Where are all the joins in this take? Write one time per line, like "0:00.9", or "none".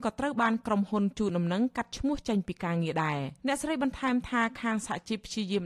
0:03.4